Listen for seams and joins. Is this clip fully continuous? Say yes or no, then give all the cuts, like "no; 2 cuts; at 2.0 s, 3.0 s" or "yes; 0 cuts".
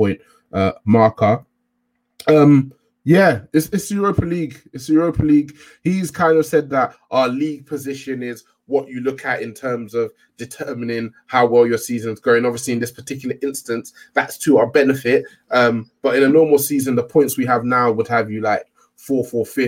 yes; 0 cuts